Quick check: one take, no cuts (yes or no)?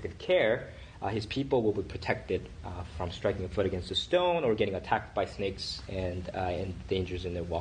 no